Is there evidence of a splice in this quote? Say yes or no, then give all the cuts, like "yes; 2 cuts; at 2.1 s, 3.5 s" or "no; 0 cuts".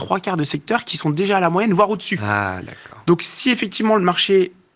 no; 0 cuts